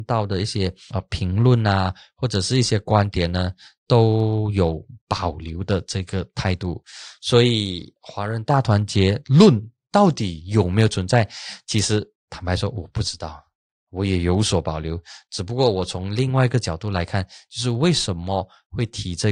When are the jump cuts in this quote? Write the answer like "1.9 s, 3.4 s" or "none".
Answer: none